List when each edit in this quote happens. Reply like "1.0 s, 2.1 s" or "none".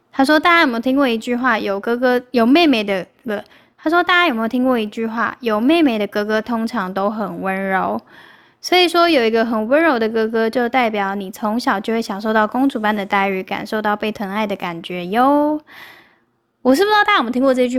none